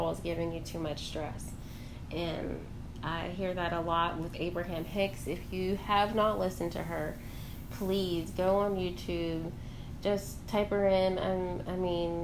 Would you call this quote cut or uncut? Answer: uncut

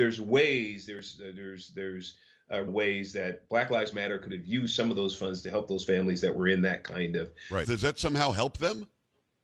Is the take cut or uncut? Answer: cut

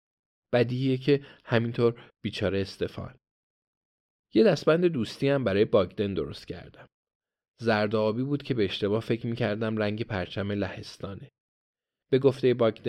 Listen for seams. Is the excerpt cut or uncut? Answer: uncut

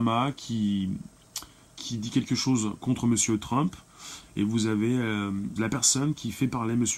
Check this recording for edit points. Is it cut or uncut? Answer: cut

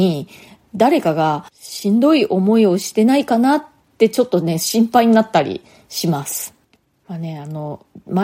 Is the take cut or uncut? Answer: uncut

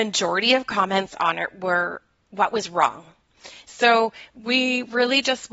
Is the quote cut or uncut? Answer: cut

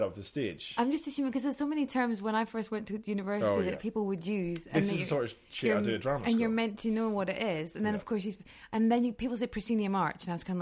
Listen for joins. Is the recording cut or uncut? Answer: uncut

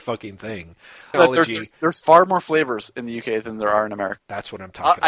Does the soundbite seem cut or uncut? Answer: cut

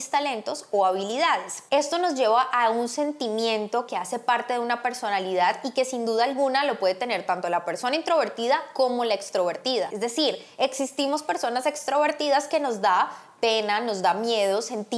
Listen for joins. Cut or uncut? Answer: uncut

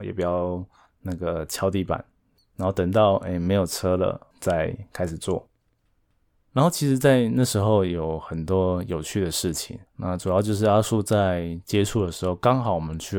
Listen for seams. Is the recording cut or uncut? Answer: cut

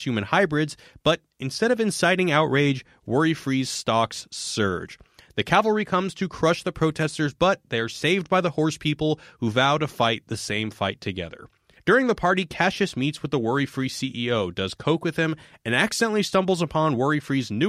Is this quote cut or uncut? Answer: cut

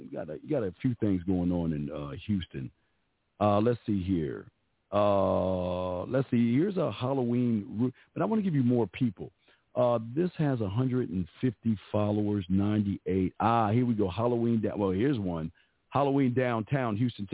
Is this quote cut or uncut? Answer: uncut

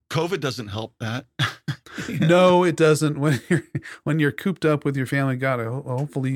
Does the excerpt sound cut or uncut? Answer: uncut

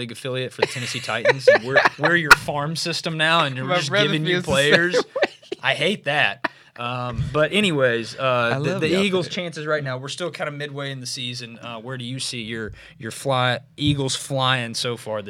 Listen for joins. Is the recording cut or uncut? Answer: uncut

